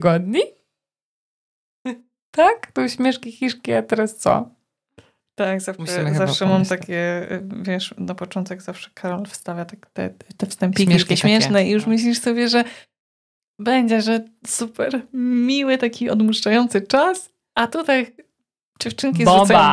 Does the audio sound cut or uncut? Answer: uncut